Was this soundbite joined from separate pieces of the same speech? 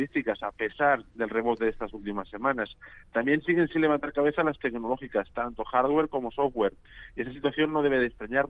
no; 0 cuts

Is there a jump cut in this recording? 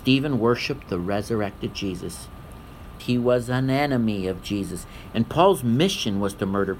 yes; 2 cuts; at 3.0 s, 5.1 s

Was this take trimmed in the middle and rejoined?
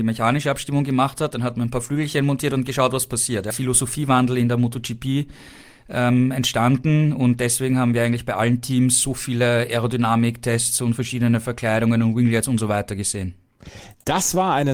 yes; 1 cut; at 3.5 s

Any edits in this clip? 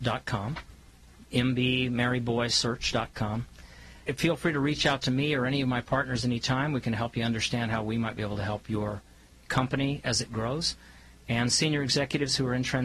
no; 0 cuts

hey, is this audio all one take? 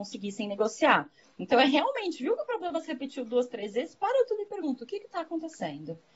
yes; 0 cuts

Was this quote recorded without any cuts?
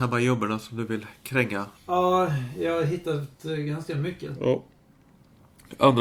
no; 2 cuts; at 1.8 s, 4.3 s

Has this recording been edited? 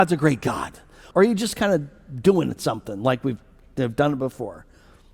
yes; 1 cut; at 1.1 s

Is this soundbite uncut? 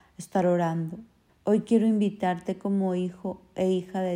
no; 1 cut; at 1.3 s

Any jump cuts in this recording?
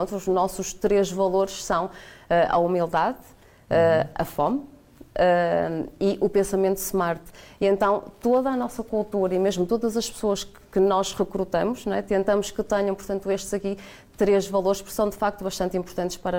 no; 0 cuts

